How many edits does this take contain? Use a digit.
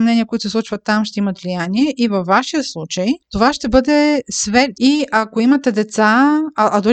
1